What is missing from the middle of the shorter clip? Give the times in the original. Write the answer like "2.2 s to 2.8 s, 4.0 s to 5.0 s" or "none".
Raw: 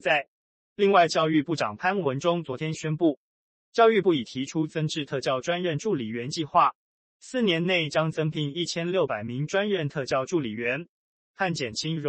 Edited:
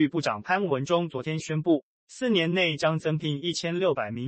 3.3 s to 7.1 s

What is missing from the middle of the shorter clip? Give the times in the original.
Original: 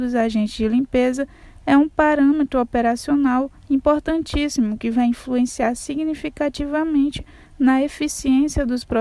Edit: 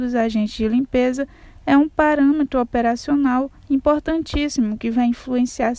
none

